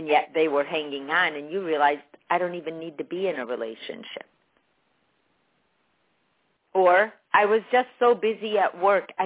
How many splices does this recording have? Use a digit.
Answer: 1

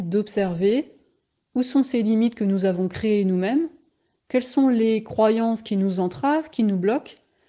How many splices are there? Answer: 0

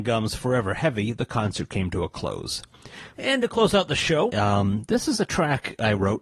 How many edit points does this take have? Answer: 2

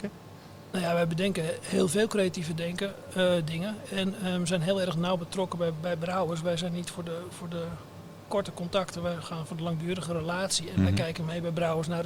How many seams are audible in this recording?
0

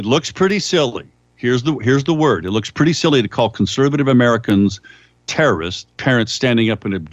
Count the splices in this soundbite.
1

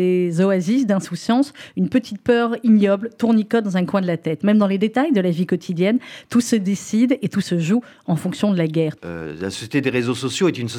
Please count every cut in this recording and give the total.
1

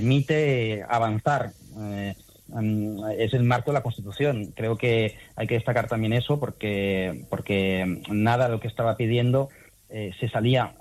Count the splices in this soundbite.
0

